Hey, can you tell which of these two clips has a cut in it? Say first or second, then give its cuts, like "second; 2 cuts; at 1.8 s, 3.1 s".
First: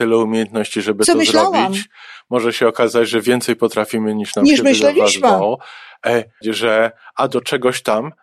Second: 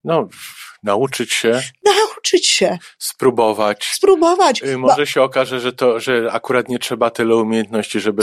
first; 1 cut; at 6.4 s